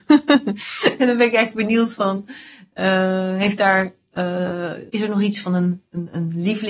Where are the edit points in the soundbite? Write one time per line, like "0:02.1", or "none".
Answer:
0:04.9